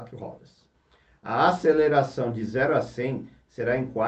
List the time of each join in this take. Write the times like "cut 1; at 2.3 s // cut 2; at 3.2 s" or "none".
none

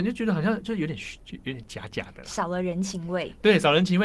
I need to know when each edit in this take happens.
none

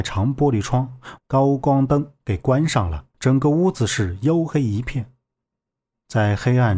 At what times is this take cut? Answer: cut 1; at 1.2 s // cut 2; at 3.1 s

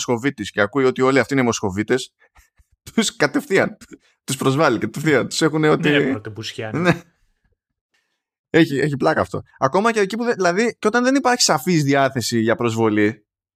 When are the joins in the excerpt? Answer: cut 1; at 8.7 s

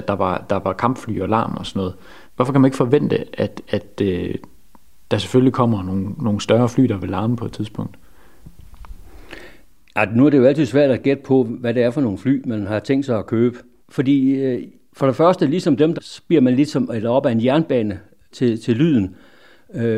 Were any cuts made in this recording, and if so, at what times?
cut 1; at 13.8 s // cut 2; at 15.9 s // cut 3; at 18.3 s

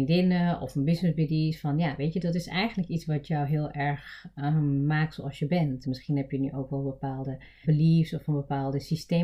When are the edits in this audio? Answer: cut 1; at 5.8 s // cut 2; at 7.6 s

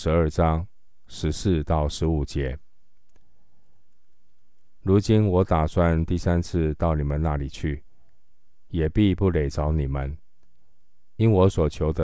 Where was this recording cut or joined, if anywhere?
none

